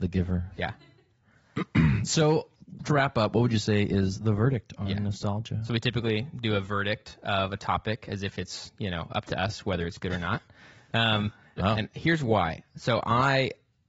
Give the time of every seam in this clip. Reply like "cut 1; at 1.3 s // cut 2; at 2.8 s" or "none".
cut 1; at 11.6 s